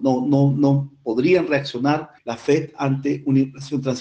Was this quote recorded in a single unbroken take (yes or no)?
no